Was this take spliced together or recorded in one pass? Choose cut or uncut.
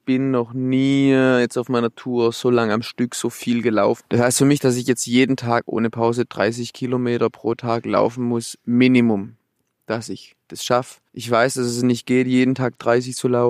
cut